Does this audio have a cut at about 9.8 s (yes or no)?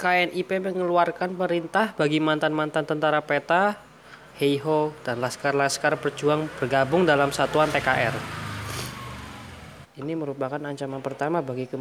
yes